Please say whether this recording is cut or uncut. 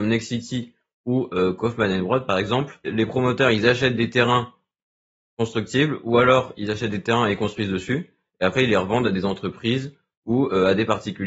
uncut